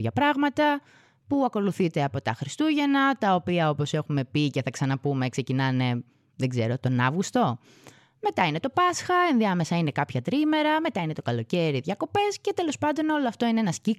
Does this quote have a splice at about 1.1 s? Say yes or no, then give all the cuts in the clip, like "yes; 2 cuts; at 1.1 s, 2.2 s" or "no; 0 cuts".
no; 0 cuts